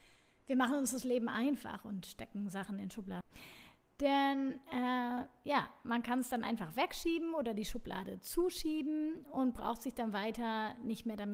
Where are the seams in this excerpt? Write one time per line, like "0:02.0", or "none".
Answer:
0:03.2

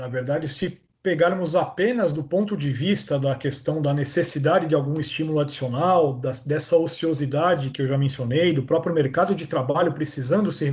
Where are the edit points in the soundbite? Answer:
0:07.7

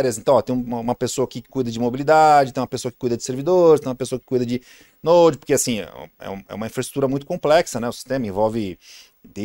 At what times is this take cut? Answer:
none

